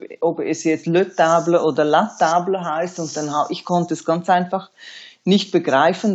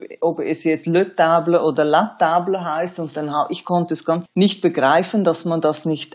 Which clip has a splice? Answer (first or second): second